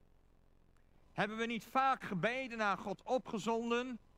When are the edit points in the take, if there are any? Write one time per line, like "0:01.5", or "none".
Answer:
0:01.0